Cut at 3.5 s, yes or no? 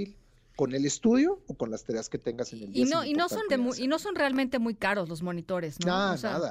yes